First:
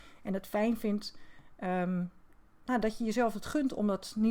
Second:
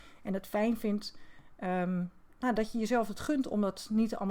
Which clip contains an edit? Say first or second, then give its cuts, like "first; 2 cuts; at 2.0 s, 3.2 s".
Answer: second; 1 cut; at 2.3 s